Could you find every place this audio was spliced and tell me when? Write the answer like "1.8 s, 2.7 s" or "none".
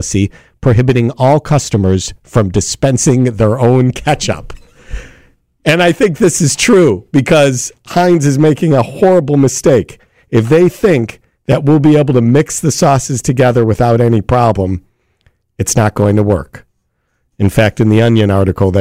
none